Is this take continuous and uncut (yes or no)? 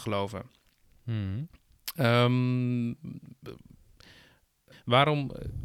no